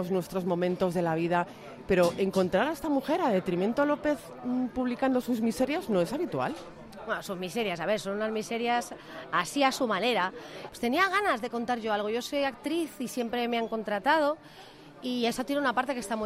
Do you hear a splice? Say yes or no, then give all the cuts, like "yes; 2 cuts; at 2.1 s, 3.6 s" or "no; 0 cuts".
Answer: yes; 1 cut; at 10.7 s